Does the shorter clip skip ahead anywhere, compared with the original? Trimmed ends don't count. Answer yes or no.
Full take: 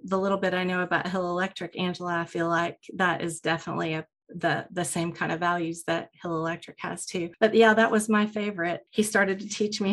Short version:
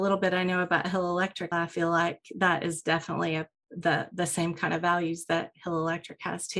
yes